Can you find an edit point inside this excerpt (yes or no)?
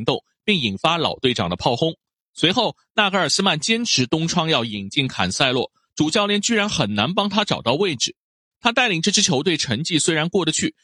yes